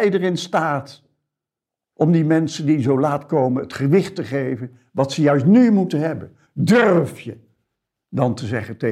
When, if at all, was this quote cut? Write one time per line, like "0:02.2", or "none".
none